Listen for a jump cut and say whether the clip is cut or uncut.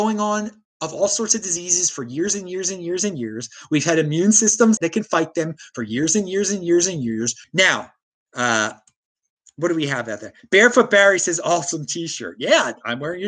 cut